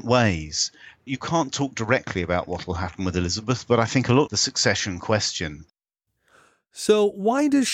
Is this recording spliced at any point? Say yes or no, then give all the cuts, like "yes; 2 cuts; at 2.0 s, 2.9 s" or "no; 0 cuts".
yes; 1 cut; at 4.3 s